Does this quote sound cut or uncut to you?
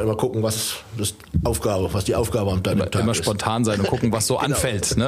uncut